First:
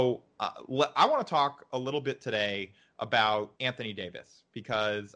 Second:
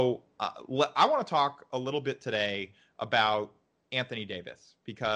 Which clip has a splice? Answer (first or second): first